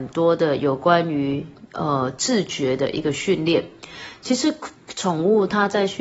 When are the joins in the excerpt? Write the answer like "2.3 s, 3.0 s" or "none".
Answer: none